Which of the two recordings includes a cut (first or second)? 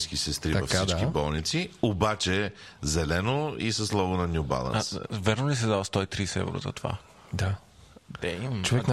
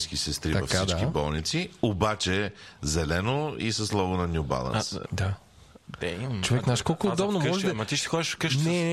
second